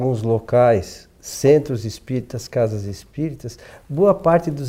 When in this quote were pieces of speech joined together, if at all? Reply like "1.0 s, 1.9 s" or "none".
none